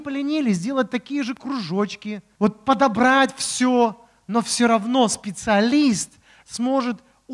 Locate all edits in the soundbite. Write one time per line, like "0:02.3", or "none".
0:02.3